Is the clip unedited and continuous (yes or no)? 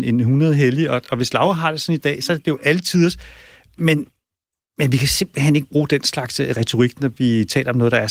yes